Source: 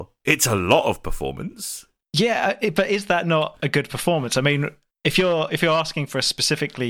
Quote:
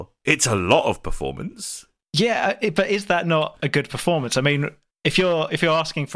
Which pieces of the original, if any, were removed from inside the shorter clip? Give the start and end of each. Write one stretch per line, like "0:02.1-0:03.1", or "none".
none